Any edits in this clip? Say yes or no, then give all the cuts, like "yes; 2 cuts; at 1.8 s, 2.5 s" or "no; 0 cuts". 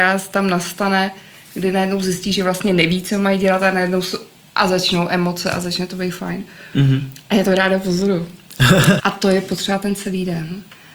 yes; 1 cut; at 9.0 s